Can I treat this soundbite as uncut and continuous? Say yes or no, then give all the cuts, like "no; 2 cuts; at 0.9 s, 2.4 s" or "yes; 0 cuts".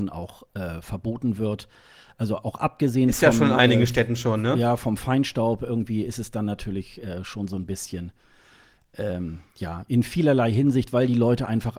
no; 1 cut; at 9.9 s